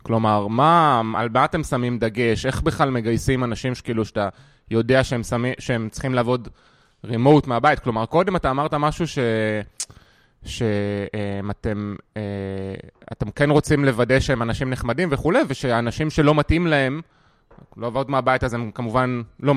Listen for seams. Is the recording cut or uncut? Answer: uncut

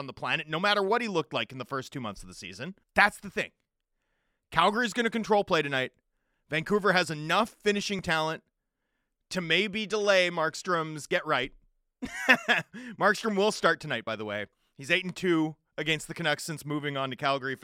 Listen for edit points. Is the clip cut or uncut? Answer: cut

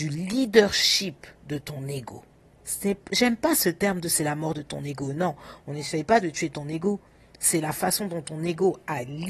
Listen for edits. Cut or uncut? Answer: uncut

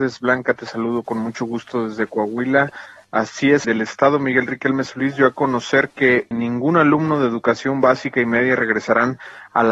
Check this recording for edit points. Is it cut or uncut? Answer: cut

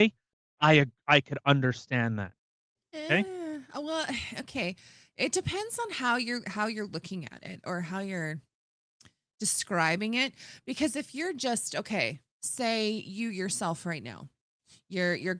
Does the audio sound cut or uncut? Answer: uncut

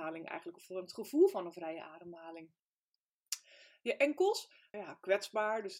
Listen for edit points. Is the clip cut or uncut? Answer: cut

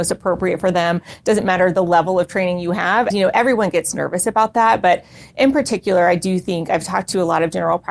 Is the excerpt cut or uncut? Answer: cut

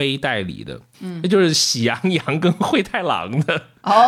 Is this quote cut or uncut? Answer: cut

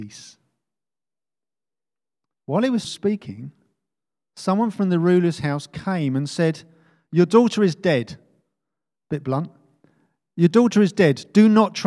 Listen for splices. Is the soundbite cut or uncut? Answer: cut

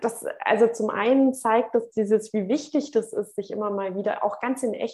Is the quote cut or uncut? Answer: uncut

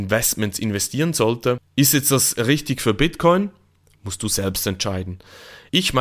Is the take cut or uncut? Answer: uncut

